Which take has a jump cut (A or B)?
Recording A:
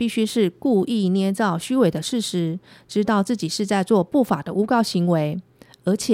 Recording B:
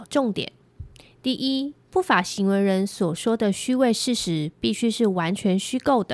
B